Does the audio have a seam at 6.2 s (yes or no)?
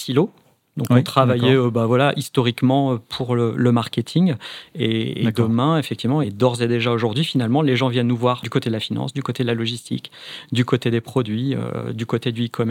no